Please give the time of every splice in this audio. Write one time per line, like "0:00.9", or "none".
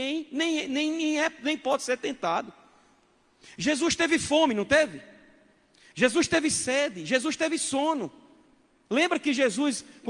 none